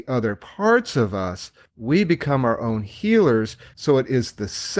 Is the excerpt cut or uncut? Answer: cut